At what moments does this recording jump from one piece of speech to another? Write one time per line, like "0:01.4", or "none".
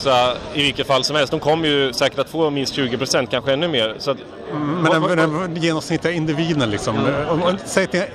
none